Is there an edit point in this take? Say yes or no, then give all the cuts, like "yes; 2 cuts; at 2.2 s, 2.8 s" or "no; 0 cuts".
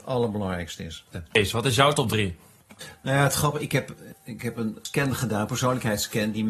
no; 0 cuts